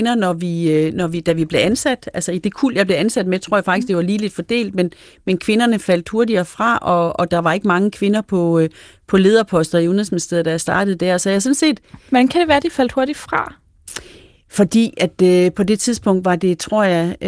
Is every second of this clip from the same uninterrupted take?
yes; 0 cuts

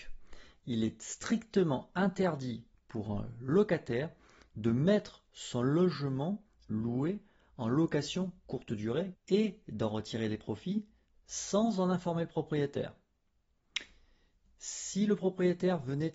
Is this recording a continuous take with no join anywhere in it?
no; 1 cut; at 9.1 s

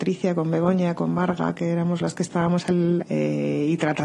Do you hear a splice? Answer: yes; 1 cut; at 3.0 s

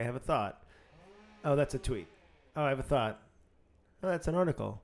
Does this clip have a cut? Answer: no; 0 cuts

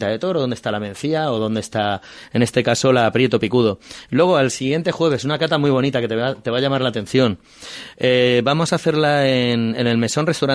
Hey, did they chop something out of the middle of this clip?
no; 0 cuts

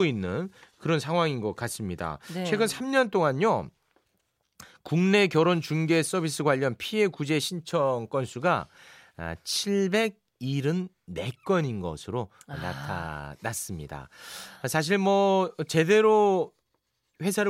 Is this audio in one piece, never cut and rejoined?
yes; 0 cuts

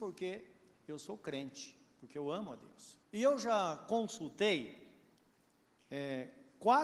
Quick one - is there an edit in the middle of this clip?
yes; 1 cut; at 3.0 s

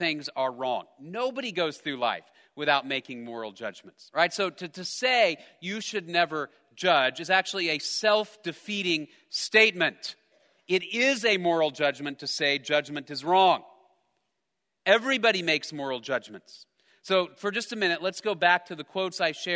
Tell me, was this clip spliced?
no; 0 cuts

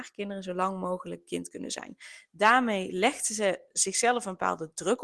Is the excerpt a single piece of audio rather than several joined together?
yes; 0 cuts

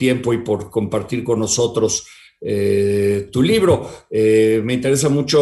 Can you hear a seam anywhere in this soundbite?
no; 0 cuts

